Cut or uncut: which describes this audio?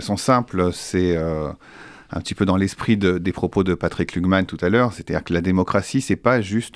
uncut